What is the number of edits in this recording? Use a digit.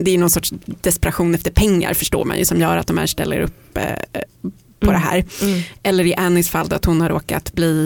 0